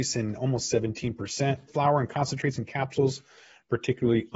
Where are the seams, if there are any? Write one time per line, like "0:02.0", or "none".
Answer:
0:01.7